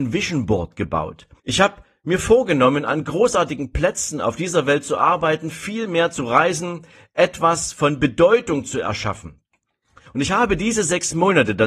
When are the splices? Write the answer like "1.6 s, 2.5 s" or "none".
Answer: 1.4 s, 10.1 s

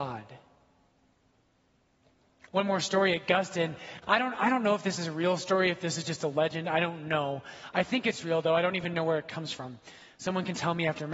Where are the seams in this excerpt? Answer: none

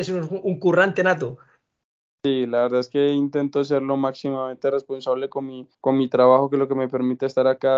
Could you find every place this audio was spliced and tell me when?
5.7 s

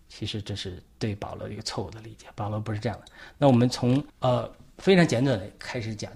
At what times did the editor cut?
4.1 s

